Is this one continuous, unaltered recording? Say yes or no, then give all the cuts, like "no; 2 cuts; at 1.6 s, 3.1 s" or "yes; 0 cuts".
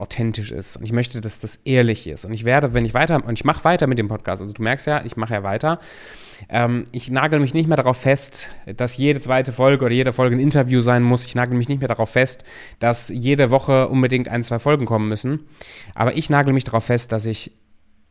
yes; 0 cuts